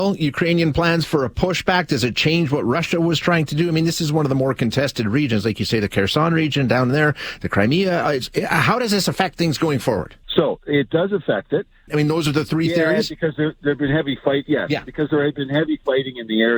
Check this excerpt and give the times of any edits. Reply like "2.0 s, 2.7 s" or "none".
10.2 s, 11.9 s